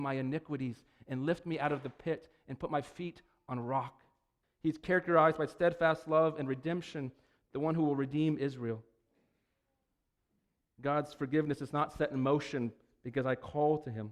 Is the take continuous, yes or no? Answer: no